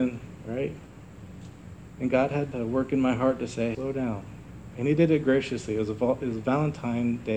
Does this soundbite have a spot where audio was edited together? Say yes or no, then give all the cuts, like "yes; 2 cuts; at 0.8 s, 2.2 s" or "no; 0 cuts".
yes; 2 cuts; at 2.5 s, 3.7 s